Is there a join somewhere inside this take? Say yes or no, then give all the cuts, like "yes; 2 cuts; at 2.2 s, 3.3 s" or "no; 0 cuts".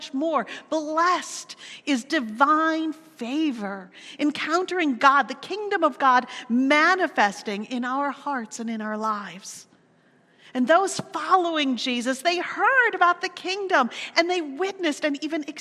no; 0 cuts